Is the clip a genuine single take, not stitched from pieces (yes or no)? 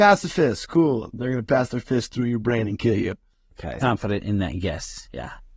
no